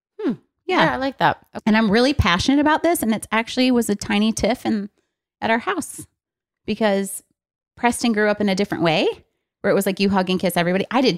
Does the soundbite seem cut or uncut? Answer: cut